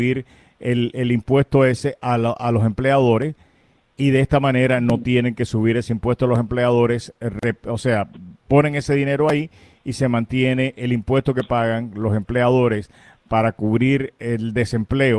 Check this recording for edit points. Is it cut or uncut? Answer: uncut